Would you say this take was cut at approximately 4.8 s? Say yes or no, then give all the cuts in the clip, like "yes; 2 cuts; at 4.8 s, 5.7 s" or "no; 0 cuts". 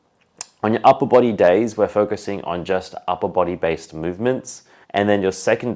yes; 1 cut; at 4.8 s